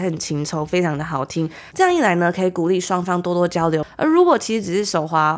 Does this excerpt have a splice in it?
yes; 1 cut; at 1.7 s

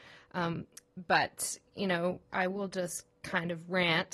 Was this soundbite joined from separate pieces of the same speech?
no; 0 cuts

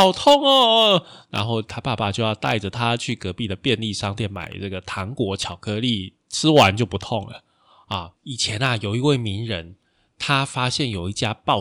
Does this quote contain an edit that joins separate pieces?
yes; 1 cut; at 8.1 s

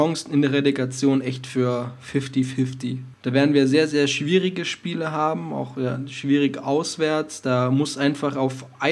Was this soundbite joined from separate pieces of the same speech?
yes; 1 cut; at 3.1 s

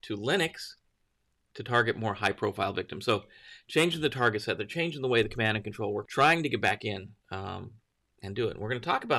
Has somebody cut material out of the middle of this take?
yes; 2 cuts; at 6.1 s, 7.2 s

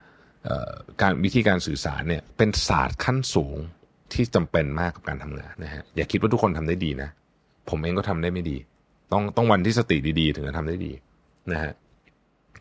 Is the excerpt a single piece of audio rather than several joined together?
no; 1 cut; at 5.5 s

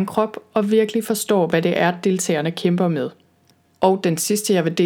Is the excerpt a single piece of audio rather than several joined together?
yes; 0 cuts

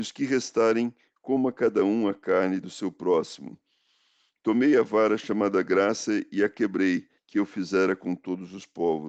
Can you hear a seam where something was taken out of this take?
yes; 1 cut; at 7.2 s

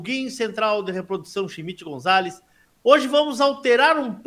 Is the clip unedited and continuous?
no; 1 cut; at 2.7 s

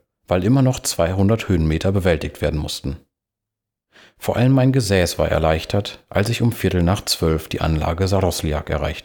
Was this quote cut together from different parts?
no; 0 cuts

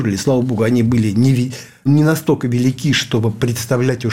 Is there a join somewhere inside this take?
yes; 1 cut; at 1.9 s

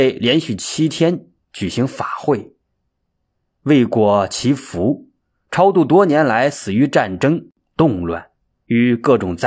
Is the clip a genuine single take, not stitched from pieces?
yes; 0 cuts

